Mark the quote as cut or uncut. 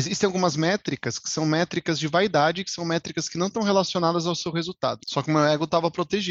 cut